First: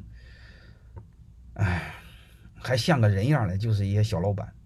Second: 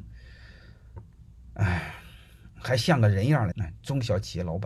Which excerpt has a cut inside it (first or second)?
second